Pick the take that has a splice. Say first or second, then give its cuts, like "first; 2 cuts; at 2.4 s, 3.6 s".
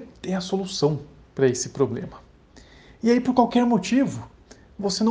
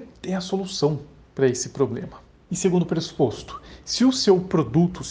second; 1 cut; at 2.5 s